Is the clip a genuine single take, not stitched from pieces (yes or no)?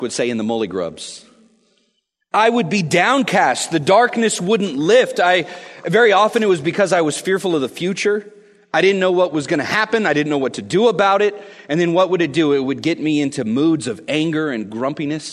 yes